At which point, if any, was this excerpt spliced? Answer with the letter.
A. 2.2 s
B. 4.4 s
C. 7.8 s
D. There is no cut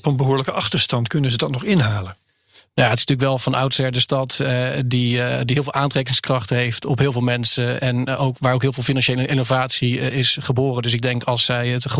D